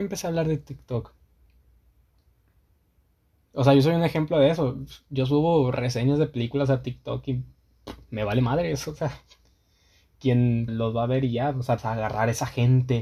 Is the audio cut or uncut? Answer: cut